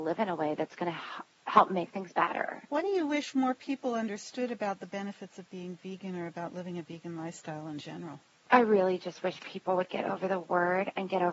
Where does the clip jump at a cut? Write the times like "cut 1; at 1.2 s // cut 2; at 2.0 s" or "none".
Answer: cut 1; at 2.7 s